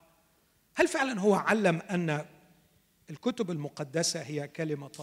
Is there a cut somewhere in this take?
no; 0 cuts

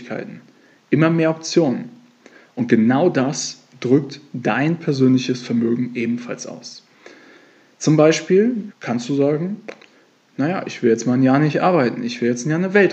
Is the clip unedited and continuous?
no; 1 cut; at 8.7 s

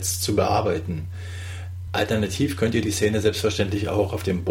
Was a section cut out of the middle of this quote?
yes; 1 cut; at 1.9 s

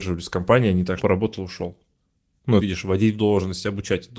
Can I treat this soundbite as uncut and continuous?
no; 2 cuts; at 1.0 s, 2.6 s

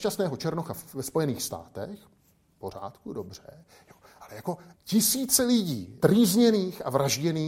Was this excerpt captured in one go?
no; 2 cuts; at 4.7 s, 6.0 s

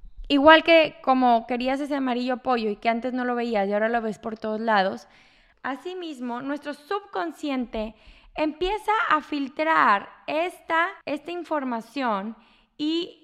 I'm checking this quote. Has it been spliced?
yes; 2 cuts; at 5.5 s, 11.0 s

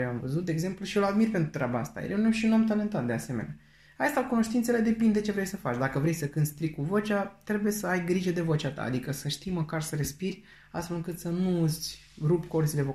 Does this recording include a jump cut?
no; 0 cuts

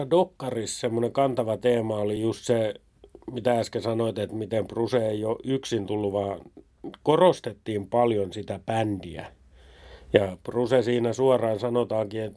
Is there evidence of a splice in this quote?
no; 0 cuts

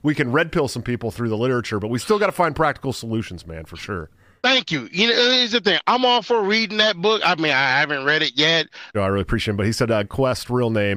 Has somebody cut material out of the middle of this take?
yes; 2 cuts; at 8.9 s, 10.0 s

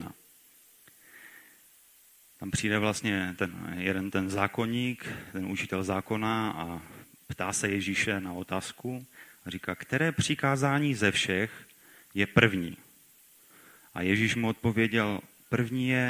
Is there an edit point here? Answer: no; 0 cuts

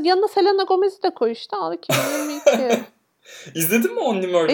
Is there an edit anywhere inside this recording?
no; 0 cuts

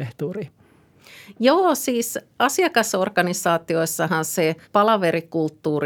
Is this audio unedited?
no; 1 cut; at 4.6 s

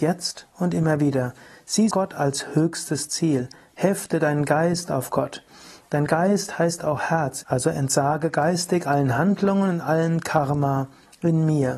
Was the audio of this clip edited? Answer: yes; 2 cuts; at 1.9 s, 7.4 s

